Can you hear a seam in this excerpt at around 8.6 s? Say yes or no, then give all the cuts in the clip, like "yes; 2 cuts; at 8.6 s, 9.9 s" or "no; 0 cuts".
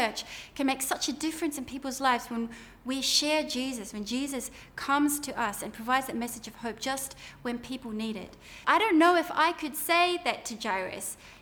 yes; 1 cut; at 8.6 s